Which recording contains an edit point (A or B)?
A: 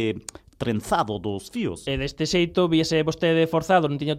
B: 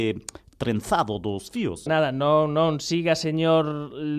B